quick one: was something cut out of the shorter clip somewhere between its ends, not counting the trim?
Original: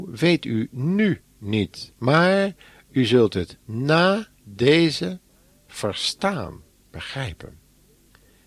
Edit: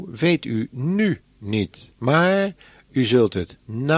no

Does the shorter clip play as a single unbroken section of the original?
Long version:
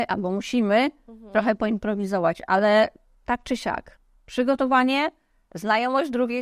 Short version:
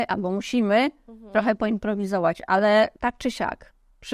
no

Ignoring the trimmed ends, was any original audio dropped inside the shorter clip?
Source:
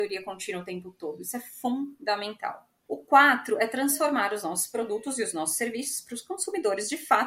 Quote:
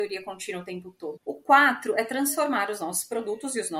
yes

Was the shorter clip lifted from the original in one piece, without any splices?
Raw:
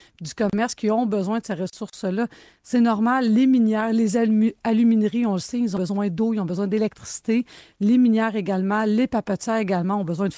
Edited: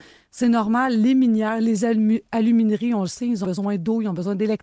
yes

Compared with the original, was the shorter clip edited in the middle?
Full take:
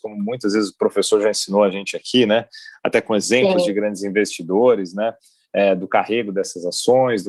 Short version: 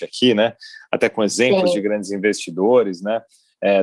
no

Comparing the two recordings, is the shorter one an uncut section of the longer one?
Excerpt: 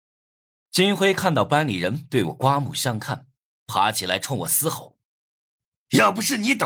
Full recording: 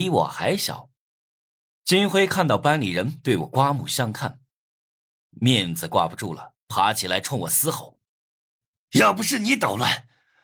no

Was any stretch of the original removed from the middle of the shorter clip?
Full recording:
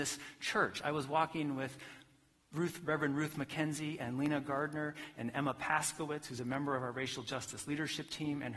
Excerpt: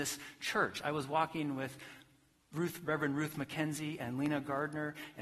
no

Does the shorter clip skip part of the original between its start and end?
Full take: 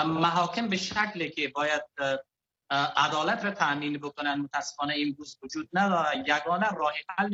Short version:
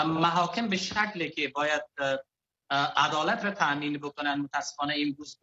no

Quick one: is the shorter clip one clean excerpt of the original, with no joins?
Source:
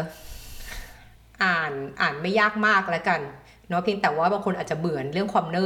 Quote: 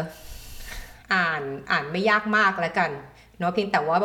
no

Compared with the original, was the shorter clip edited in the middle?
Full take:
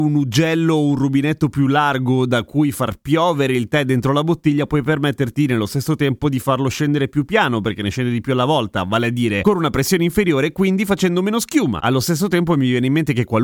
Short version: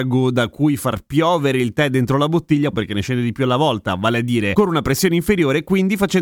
yes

